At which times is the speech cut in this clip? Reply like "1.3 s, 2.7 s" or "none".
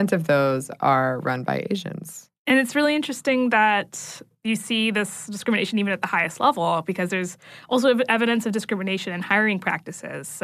none